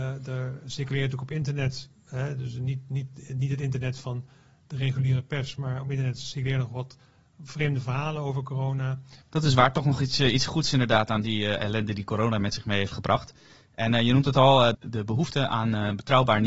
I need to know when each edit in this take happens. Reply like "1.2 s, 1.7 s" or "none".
9.2 s, 14.7 s